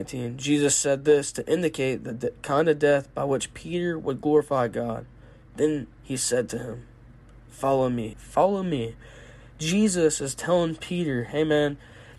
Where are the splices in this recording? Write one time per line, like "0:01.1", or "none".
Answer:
0:08.1